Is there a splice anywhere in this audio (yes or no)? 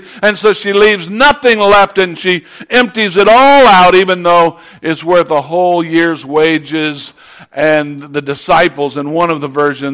no